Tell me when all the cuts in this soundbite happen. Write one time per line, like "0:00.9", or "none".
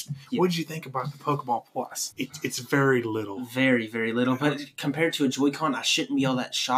0:02.1